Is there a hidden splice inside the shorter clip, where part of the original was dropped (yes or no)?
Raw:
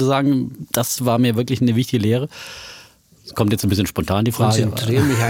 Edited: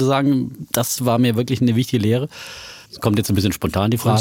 yes